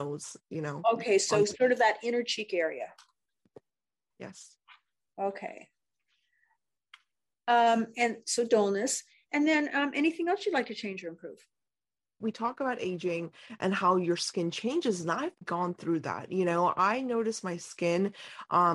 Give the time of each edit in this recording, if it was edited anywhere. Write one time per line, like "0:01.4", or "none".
0:12.2
0:15.4